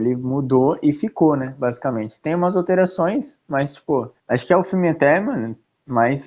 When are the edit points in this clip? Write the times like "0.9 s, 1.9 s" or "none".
none

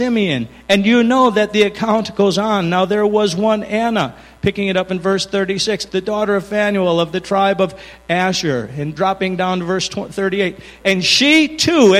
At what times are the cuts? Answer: 5.9 s, 10.8 s

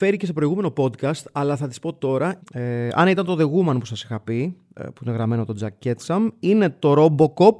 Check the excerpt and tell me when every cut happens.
2.4 s, 4.8 s

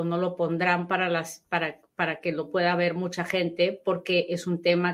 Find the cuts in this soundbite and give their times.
none

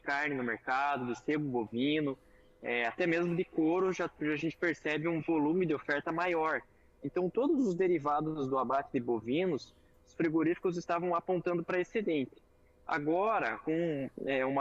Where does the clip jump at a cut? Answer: none

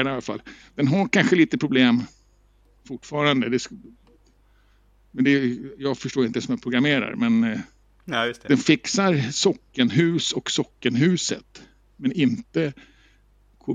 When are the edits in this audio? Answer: none

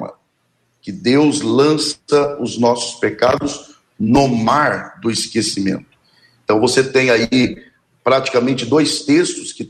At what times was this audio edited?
6.4 s

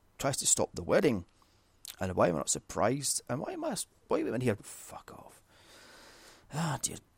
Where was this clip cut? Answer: 4.6 s

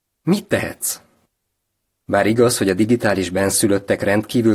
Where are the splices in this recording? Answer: 2.0 s

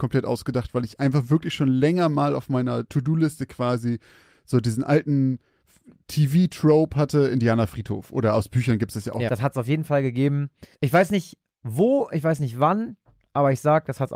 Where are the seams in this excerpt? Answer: 2.9 s, 9.3 s, 10.7 s

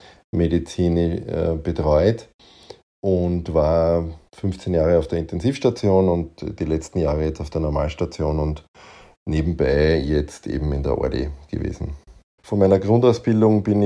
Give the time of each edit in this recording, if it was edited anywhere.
12.4 s

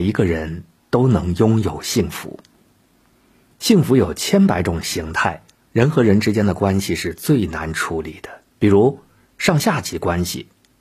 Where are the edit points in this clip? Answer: 5.7 s, 8.5 s

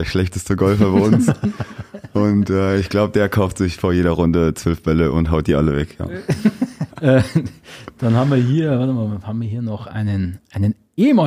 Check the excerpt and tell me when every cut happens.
6.9 s

